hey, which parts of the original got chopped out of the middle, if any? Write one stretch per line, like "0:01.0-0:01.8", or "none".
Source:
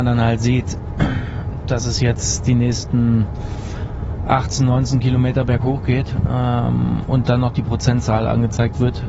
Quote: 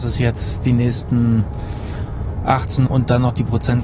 0:04.7-0:07.1